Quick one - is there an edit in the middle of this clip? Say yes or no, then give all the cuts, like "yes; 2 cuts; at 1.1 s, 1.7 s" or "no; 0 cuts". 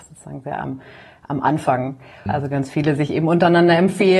yes; 1 cut; at 2.3 s